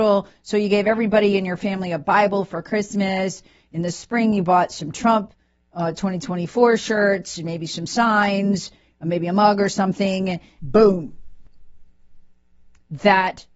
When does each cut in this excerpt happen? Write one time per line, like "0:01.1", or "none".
0:10.6